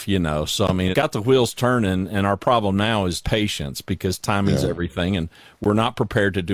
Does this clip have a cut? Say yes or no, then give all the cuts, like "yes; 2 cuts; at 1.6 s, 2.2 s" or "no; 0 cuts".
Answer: yes; 2 cuts; at 0.9 s, 3.2 s